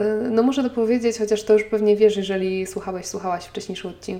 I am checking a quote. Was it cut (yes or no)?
no